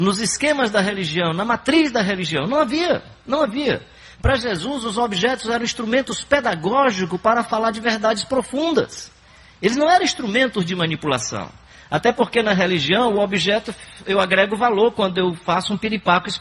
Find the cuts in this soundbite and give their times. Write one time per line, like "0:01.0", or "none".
none